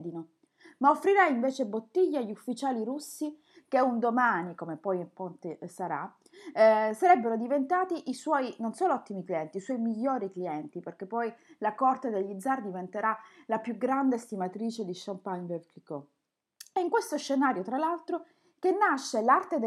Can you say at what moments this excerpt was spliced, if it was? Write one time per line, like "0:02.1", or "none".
none